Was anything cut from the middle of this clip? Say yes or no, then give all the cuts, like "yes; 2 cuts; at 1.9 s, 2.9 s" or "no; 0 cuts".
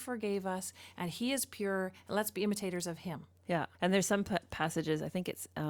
yes; 1 cut; at 3.7 s